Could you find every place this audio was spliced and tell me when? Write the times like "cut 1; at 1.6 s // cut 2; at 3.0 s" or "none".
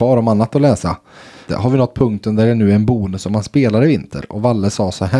cut 1; at 1.5 s